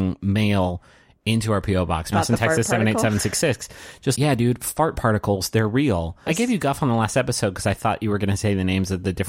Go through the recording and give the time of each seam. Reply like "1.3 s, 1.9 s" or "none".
2.1 s, 4.1 s, 6.3 s